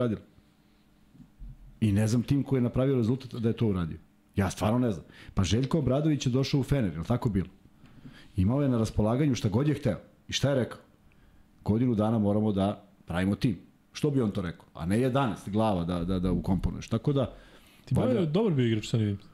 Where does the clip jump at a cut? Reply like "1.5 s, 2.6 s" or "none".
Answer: 14.8 s